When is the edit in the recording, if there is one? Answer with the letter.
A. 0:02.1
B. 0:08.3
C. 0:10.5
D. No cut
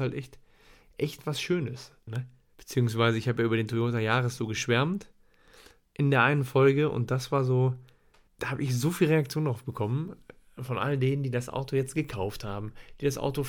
A